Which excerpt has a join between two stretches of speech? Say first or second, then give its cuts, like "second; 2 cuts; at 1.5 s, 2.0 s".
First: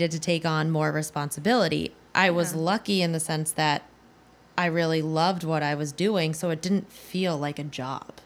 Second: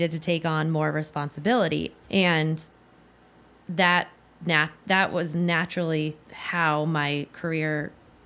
second; 2 cuts; at 2.0 s, 6.2 s